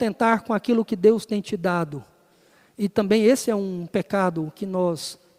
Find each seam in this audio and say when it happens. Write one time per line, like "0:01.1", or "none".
none